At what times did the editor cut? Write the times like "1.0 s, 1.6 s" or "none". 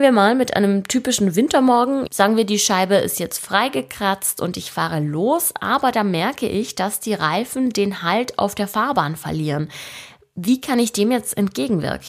2.1 s